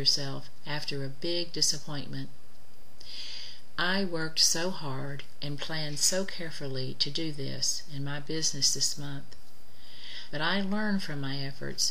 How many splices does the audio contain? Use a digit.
1